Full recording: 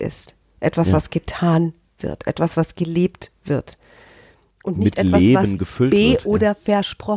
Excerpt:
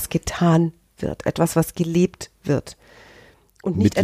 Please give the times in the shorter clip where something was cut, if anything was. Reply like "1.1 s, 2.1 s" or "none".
none